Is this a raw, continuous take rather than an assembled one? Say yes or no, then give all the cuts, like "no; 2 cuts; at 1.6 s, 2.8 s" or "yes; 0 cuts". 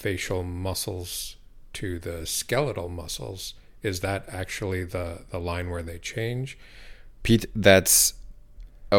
no; 1 cut; at 7.2 s